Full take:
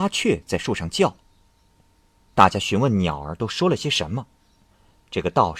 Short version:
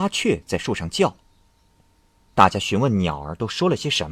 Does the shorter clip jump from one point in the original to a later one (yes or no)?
no